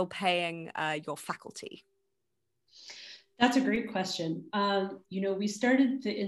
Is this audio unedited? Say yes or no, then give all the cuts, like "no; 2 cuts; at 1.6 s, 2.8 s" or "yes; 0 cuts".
no; 1 cut; at 5.0 s